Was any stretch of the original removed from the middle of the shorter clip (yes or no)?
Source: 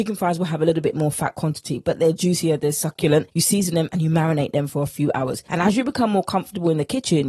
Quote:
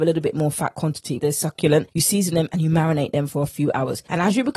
yes